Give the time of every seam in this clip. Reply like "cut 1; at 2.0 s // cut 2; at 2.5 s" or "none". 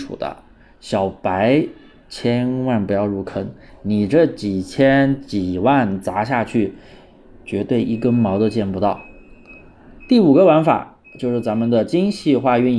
none